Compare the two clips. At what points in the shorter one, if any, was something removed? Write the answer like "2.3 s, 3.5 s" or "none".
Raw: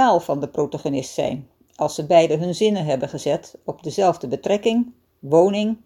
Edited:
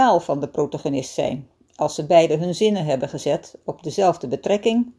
none